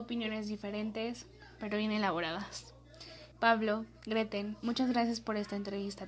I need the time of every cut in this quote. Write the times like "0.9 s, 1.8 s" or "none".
3.3 s